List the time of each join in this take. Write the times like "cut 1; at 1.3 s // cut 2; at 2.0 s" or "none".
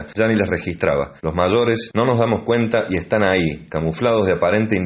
cut 1; at 1.2 s